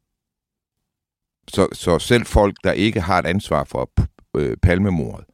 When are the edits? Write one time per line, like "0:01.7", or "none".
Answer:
0:01.7